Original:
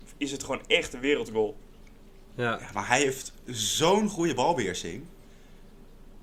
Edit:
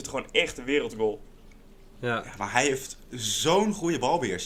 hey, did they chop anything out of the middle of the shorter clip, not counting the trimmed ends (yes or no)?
no